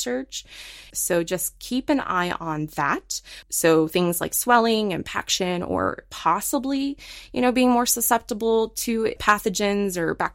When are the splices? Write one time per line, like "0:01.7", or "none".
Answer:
0:00.9
0:03.4
0:09.2